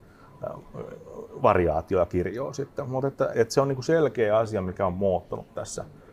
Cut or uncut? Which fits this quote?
cut